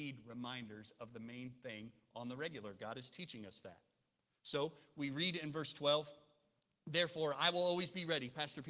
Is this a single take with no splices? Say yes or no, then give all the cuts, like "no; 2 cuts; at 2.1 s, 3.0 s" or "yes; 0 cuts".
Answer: yes; 0 cuts